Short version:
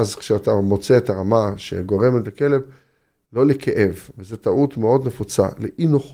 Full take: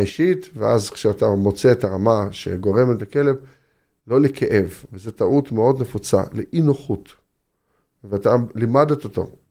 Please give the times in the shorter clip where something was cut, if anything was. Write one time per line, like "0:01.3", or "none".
none